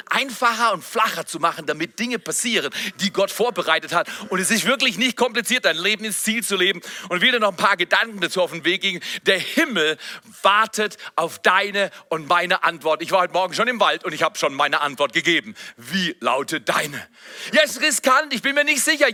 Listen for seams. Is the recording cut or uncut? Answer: uncut